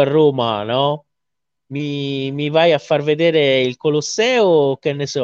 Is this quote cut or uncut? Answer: uncut